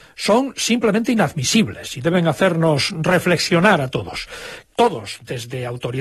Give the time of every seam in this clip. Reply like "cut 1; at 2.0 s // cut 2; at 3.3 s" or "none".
cut 1; at 4.6 s